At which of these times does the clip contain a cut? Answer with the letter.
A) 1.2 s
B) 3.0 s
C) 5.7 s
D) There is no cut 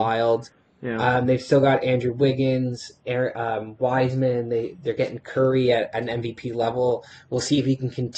D